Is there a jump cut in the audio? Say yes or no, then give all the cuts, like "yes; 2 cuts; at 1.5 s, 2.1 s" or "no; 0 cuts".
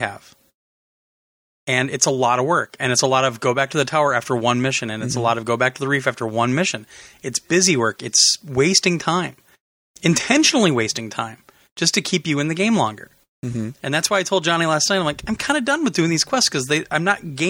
no; 0 cuts